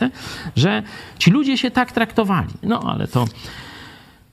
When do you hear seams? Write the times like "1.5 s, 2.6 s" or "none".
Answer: 2.6 s